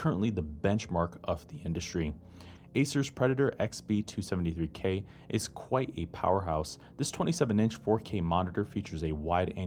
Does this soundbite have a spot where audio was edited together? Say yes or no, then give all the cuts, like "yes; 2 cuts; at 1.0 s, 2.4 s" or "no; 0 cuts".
yes; 1 cut; at 2.6 s